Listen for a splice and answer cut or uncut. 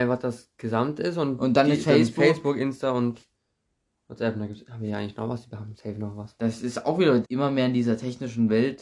cut